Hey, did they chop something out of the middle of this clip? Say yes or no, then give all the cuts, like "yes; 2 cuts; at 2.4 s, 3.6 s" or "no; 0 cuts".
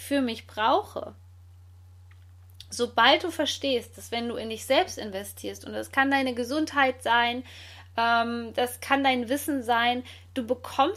no; 0 cuts